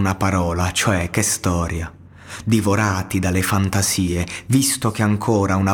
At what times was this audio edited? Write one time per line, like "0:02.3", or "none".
0:02.4